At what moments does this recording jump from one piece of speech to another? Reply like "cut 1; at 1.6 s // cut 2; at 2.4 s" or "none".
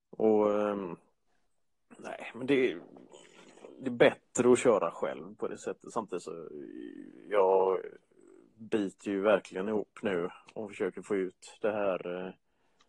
none